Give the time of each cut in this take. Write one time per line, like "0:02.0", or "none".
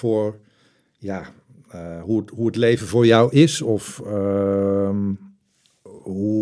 none